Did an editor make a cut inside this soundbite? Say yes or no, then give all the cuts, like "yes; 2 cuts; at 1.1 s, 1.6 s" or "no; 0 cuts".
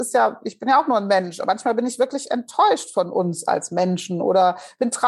no; 0 cuts